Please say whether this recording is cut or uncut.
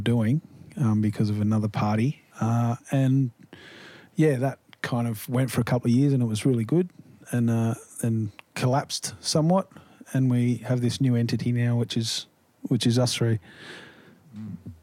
cut